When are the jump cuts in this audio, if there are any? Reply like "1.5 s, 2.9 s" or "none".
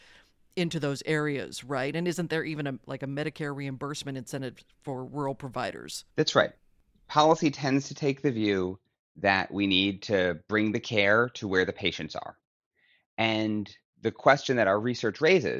6.1 s